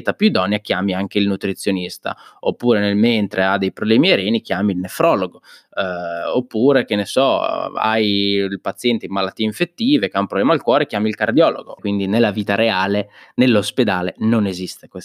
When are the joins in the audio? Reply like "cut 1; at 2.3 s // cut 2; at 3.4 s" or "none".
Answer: cut 1; at 11.8 s